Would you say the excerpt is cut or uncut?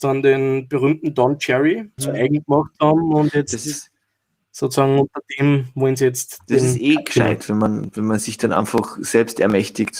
cut